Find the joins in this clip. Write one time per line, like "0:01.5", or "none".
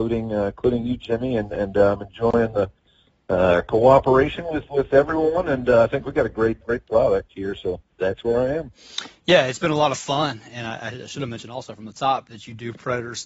0:06.6